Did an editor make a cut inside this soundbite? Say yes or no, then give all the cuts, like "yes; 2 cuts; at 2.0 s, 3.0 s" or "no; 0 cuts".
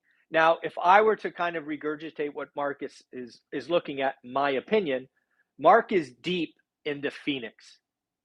no; 0 cuts